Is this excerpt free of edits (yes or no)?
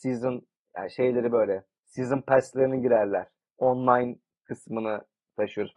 no